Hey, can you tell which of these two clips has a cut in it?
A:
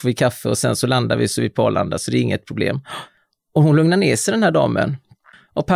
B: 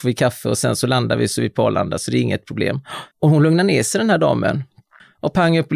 B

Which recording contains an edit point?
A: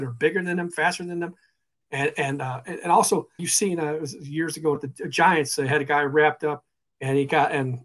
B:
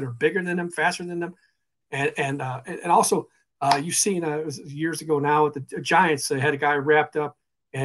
A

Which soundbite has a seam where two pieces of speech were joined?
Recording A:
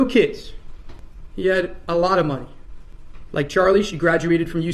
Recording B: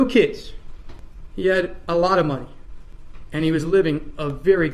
A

